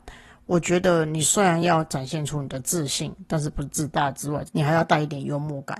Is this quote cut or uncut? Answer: cut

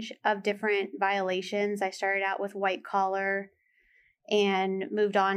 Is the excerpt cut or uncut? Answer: uncut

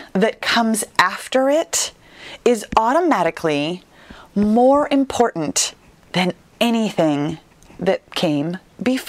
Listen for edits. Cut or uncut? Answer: uncut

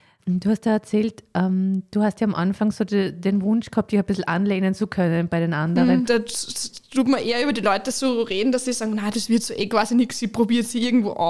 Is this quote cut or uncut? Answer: cut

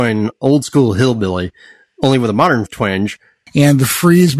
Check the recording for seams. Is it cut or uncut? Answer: cut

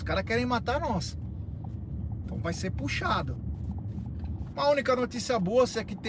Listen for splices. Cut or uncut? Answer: cut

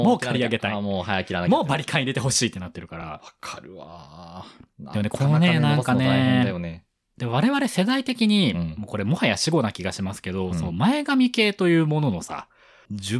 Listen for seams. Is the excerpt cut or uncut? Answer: uncut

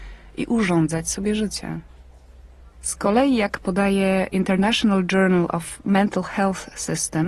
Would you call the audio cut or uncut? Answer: cut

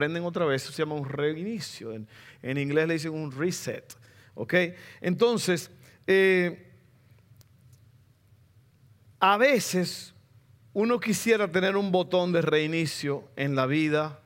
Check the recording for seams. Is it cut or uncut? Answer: uncut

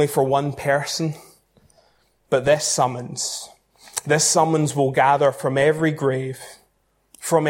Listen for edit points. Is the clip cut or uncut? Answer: uncut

